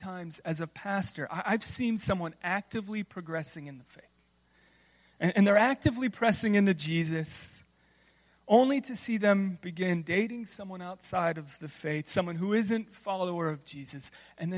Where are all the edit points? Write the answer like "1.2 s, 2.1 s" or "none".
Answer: none